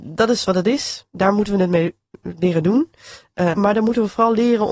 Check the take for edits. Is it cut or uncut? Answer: cut